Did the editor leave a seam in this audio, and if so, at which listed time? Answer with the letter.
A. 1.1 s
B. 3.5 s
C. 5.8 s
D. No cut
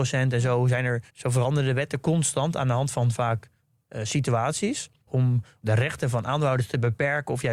A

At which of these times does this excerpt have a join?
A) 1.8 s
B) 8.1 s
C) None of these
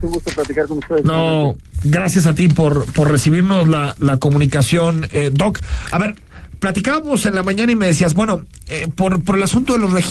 C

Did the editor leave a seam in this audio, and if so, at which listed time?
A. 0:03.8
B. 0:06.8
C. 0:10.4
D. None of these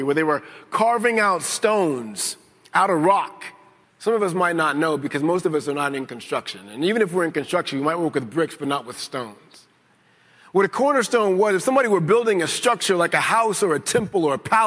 A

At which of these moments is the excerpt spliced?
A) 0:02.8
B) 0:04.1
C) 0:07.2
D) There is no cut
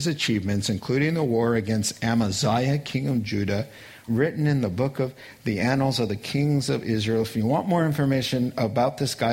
B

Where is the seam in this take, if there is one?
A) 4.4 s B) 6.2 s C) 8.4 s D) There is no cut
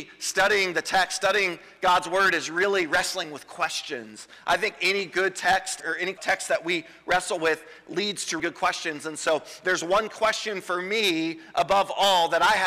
C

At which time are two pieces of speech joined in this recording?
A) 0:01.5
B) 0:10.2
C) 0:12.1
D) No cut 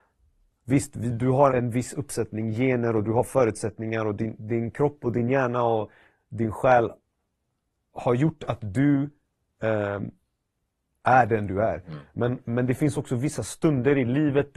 A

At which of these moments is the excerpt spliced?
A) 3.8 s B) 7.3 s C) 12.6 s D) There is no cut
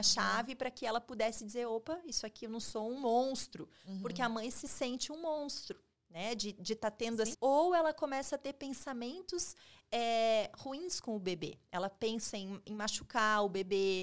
B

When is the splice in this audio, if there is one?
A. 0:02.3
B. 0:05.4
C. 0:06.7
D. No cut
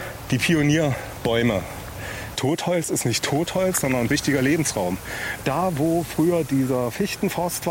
A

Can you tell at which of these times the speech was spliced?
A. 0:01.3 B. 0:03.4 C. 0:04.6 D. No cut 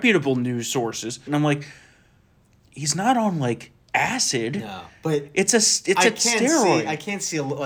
A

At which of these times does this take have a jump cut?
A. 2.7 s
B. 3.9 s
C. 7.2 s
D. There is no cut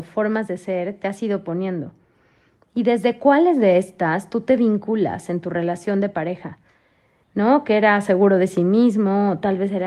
C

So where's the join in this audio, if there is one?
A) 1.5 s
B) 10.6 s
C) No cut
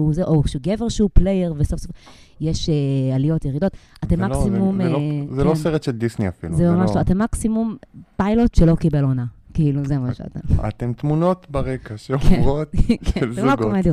C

